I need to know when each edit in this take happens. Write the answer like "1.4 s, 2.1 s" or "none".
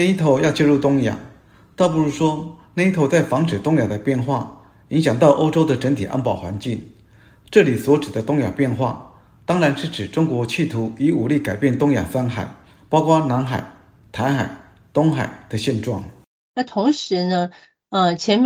none